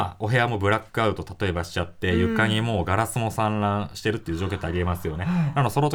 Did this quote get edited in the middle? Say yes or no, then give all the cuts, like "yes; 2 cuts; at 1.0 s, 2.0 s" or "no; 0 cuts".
no; 0 cuts